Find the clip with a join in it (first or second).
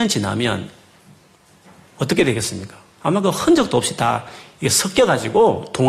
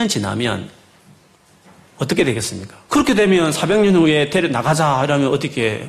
second